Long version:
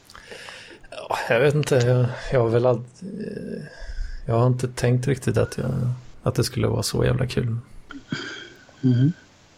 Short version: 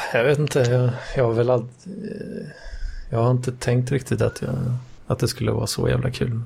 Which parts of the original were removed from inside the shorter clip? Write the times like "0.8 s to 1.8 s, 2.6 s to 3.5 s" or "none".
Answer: none

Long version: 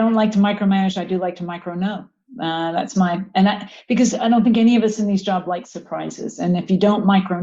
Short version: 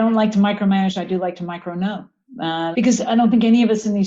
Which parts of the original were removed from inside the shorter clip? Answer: 2.7 s to 3.9 s

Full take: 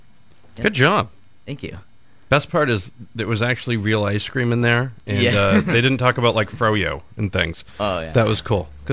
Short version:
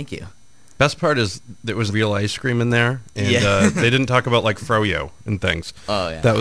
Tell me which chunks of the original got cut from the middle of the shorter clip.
3.4 s to 3.8 s

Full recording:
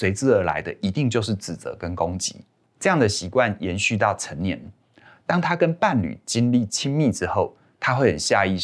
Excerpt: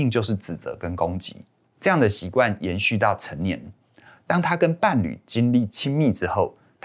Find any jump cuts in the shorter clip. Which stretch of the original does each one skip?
none

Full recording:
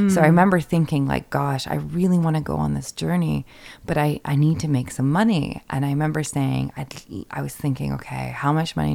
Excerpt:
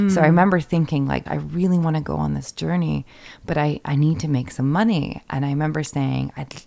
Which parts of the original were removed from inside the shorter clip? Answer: 1.3 s to 1.7 s

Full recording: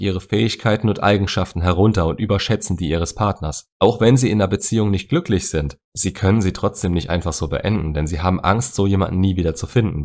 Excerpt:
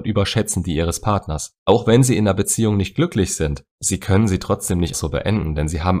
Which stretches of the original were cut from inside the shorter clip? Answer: 7.1 s to 7.3 s

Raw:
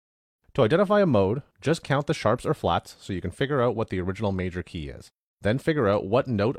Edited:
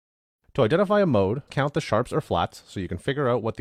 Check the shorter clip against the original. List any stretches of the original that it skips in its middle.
1.5 s to 1.8 s

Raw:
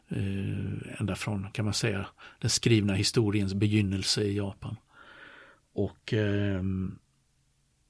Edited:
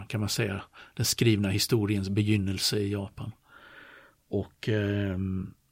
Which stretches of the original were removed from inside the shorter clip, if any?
none

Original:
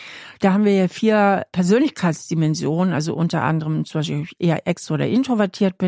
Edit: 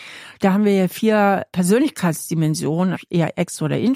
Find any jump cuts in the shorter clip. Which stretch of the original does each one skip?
2.9 s to 4.2 s

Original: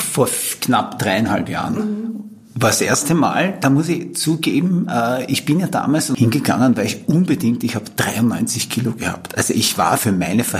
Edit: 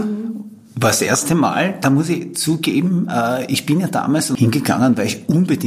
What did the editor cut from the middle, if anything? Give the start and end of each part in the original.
none

